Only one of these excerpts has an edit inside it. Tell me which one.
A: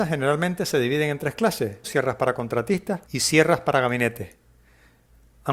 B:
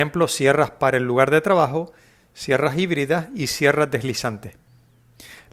A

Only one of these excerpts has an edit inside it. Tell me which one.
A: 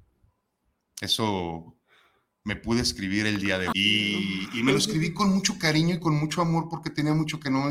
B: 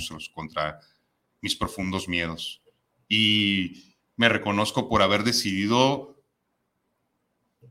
A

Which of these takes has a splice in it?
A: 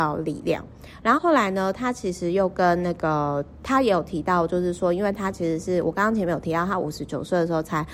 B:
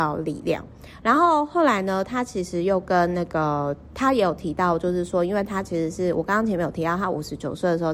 A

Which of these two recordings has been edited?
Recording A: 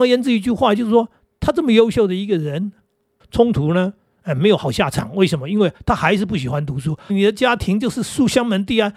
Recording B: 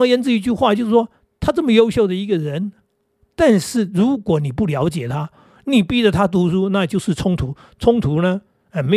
A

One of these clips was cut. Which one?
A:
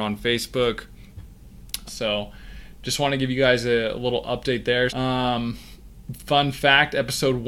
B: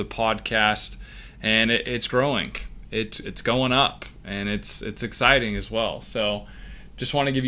A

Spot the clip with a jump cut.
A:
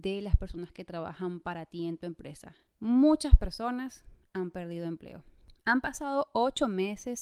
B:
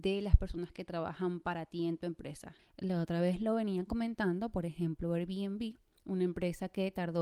B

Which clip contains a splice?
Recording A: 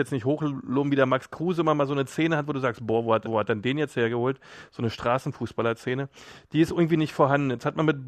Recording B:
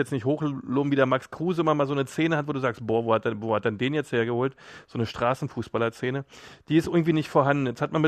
A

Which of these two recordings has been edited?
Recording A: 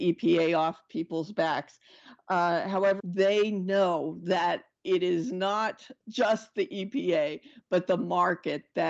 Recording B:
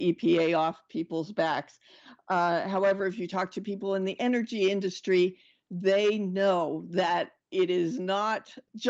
A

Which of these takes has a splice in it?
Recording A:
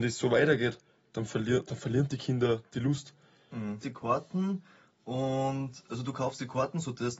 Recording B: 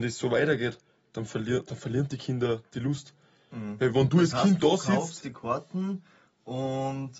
A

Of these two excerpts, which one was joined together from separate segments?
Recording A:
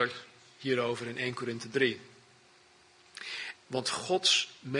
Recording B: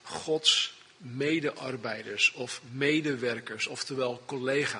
A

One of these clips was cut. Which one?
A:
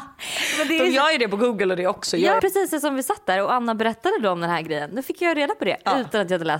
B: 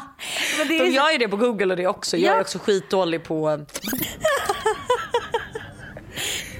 A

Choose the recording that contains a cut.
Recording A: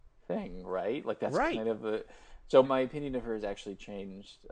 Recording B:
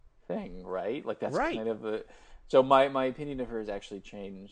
A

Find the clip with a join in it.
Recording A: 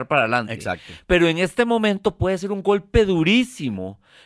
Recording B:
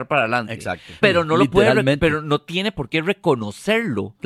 B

